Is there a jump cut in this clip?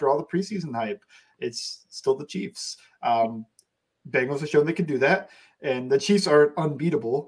no; 0 cuts

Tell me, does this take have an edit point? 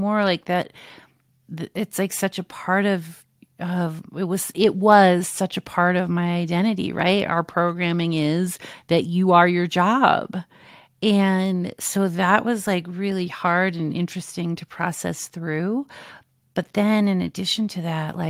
no; 0 cuts

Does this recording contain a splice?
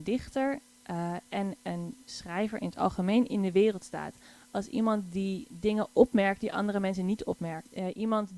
no; 0 cuts

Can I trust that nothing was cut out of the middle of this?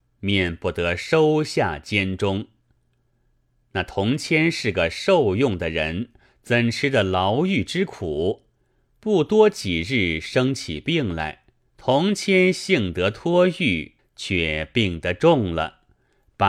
no; 2 cuts; at 11.7 s, 14.0 s

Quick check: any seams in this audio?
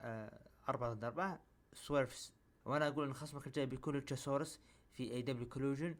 yes; 1 cut; at 2.6 s

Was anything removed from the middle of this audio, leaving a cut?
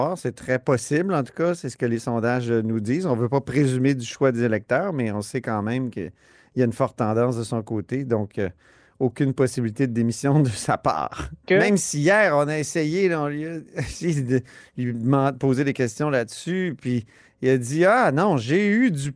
yes; 1 cut; at 11.5 s

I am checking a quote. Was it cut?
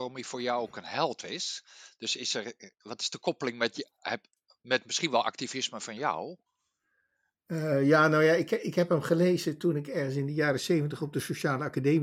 no; 0 cuts

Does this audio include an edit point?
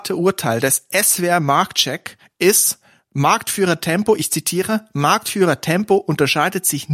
no; 0 cuts

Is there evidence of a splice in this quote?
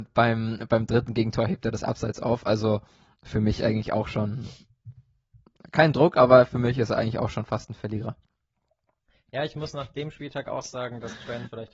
no; 0 cuts

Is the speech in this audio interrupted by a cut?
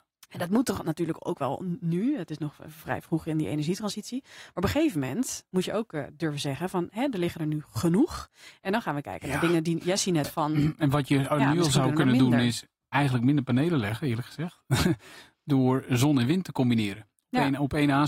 yes; 1 cut; at 10.2 s

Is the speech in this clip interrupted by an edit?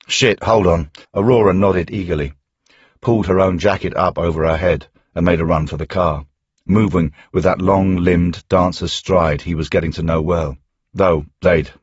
yes; 1 cut; at 1.0 s

